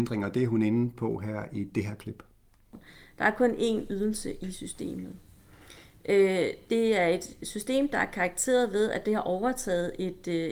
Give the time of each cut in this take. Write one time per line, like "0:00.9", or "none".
none